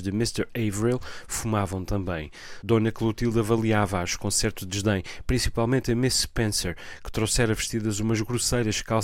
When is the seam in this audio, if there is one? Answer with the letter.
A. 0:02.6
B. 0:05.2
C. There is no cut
C